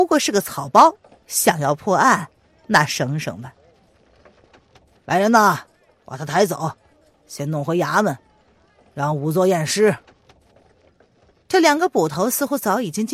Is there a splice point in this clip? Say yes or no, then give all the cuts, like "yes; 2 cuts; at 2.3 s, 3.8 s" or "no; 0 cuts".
yes; 1 cut; at 5.0 s